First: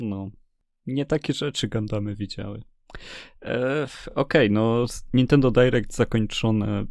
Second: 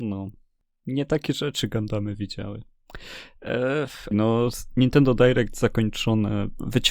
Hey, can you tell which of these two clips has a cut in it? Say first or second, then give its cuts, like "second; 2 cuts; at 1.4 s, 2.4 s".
second; 1 cut; at 4.1 s